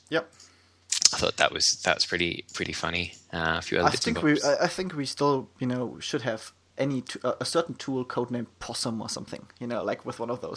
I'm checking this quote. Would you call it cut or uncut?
uncut